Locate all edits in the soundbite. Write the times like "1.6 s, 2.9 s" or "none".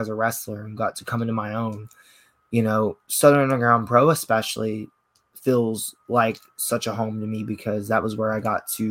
none